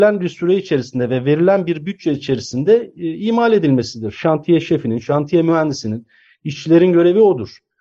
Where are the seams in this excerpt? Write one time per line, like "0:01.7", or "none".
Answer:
none